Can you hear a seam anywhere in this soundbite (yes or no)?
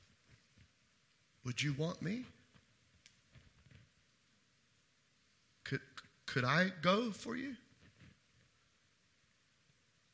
no